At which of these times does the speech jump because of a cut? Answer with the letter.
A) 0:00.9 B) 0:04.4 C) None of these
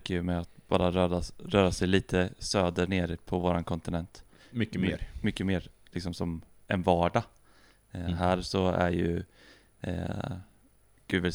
B